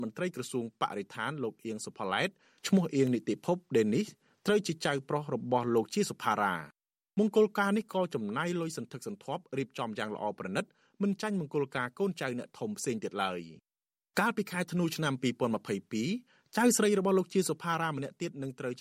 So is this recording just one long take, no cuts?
yes; 0 cuts

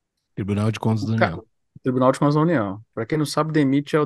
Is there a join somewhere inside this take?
yes; 1 cut; at 2.9 s

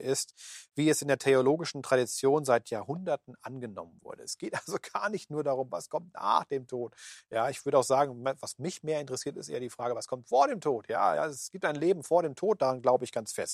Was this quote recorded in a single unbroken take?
yes; 0 cuts

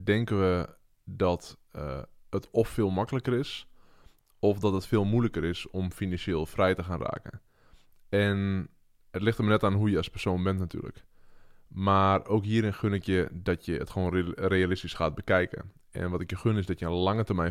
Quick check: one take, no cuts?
yes; 0 cuts

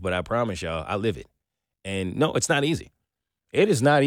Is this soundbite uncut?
yes; 0 cuts

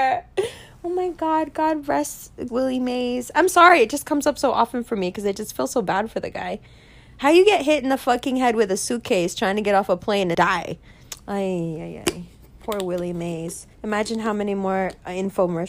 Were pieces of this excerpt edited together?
yes; 3 cuts; at 2.5 s, 10.3 s, 13.7 s

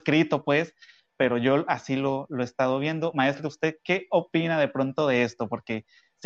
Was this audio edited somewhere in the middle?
no; 0 cuts

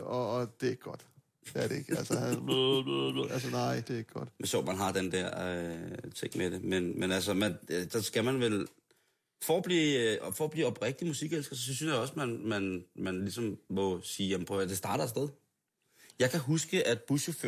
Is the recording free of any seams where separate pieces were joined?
yes; 0 cuts

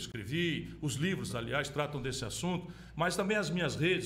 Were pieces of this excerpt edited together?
no; 0 cuts

